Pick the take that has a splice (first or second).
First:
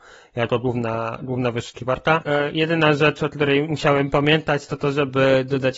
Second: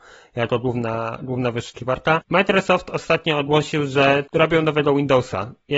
second